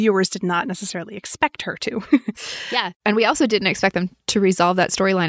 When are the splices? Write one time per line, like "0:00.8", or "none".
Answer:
none